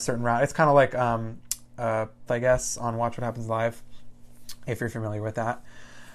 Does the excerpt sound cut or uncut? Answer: cut